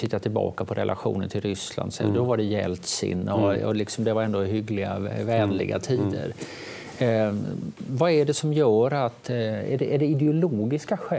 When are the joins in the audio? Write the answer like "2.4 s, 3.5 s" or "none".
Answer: none